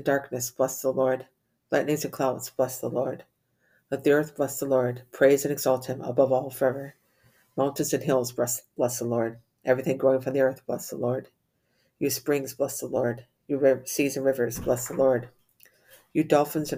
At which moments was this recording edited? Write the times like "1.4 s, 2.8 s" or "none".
none